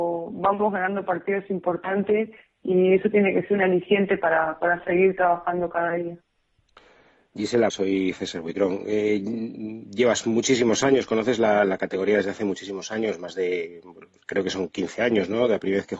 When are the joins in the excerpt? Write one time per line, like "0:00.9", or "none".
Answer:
0:07.7